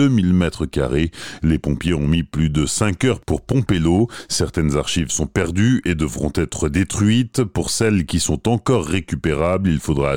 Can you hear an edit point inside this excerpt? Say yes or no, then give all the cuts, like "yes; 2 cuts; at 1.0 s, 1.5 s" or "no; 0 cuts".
no; 0 cuts